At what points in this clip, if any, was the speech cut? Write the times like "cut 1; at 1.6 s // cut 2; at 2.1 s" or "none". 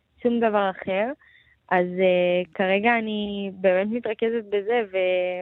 none